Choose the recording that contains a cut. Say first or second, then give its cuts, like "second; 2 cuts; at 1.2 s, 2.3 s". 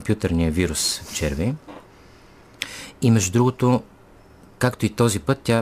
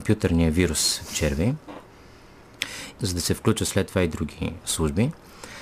second; 1 cut; at 3.0 s